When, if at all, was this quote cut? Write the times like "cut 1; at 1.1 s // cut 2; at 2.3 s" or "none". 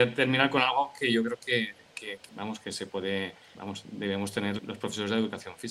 cut 1; at 2.3 s // cut 2; at 3.5 s // cut 3; at 4.6 s